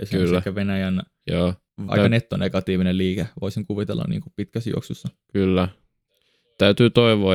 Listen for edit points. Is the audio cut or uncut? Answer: cut